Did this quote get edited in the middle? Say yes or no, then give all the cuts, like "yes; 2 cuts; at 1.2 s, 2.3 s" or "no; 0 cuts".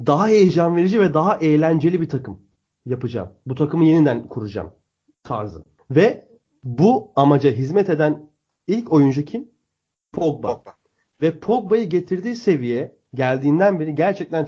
yes; 1 cut; at 5.8 s